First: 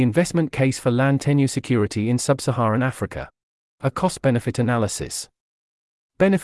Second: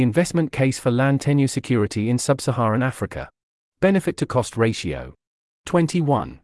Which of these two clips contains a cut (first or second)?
second